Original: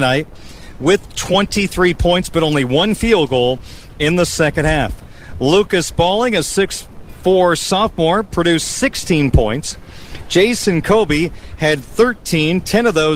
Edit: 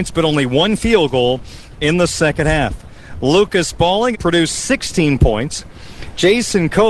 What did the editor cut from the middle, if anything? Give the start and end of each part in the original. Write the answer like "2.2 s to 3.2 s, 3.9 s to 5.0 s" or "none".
6.3 s to 8.2 s